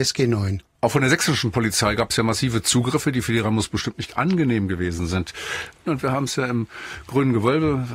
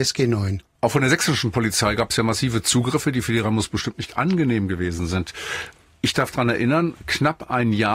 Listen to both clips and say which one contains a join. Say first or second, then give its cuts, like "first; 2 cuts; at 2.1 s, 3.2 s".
first; 1 cut; at 5.8 s